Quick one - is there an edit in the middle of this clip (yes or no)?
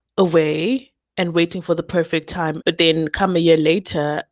yes